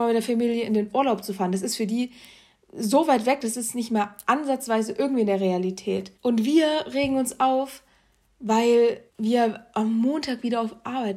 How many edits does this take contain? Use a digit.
2